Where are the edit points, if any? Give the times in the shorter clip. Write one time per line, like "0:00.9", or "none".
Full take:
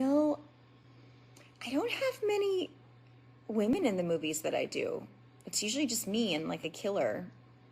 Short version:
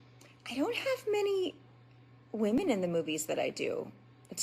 none